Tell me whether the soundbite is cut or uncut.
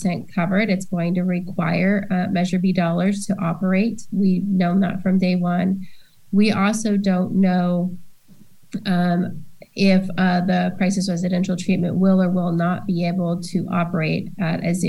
uncut